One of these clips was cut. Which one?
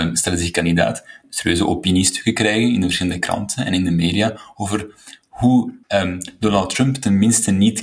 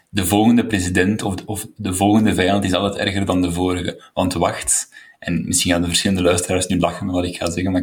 first; 2 cuts; at 1.2 s, 5.8 s

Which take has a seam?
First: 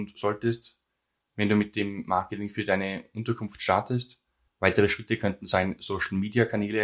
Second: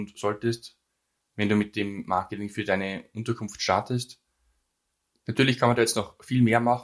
first; 1 cut; at 4.5 s

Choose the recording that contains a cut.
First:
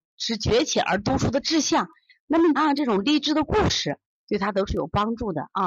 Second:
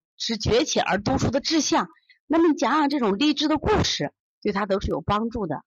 first; 1 cut; at 2.6 s

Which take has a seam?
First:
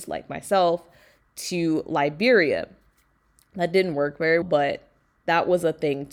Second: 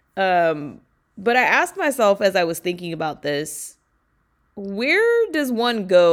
first; 1 cut; at 4.4 s

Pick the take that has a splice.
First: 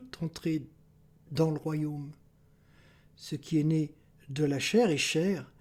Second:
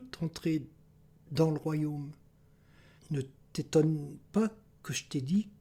second; 1 cut; at 3.0 s

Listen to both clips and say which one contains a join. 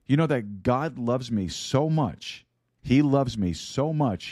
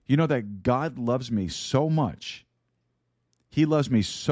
first; 1 cut; at 2.8 s

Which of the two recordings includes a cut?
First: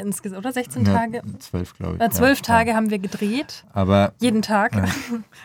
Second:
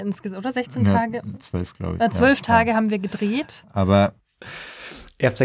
second; 1 cut; at 4.2 s

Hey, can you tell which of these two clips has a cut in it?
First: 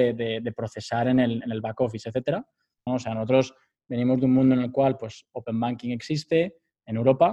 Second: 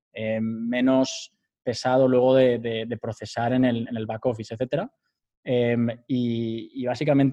first; 1 cut; at 2.9 s

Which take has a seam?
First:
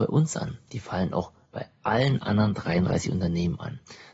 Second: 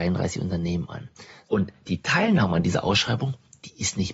second; 1 cut; at 1.4 s

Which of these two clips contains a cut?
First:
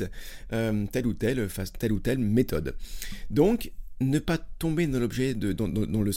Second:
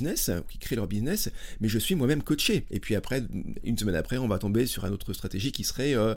second; 1 cut; at 2.7 s

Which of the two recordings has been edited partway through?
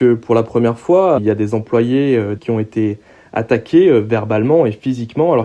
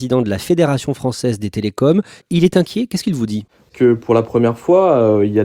first; 2 cuts; at 1.2 s, 2.4 s

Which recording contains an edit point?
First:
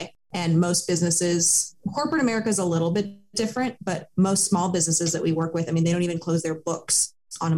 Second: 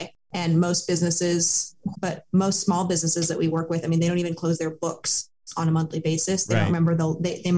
second; 1 cut; at 1.9 s

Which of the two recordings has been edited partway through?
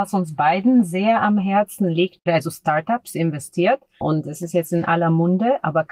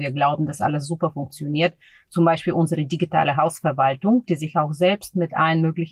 first; 2 cuts; at 2.3 s, 4.0 s

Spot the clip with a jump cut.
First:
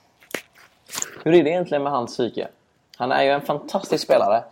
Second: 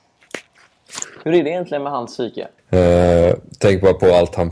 second; 1 cut; at 2.6 s

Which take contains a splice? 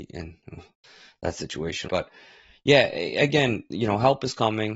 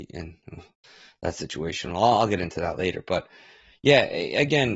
first; 1 cut; at 1.9 s

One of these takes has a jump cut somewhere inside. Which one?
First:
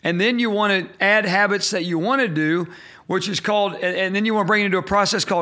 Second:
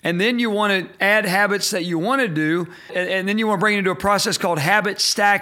second; 1 cut; at 2.9 s

